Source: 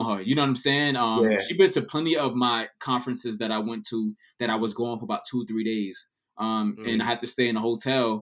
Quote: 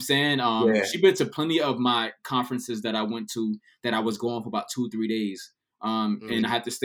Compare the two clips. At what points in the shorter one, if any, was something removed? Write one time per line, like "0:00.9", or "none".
none